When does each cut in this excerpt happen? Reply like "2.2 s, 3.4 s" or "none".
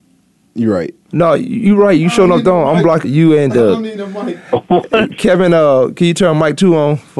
1.1 s, 3.0 s